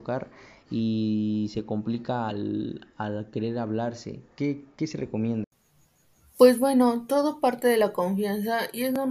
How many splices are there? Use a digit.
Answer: 0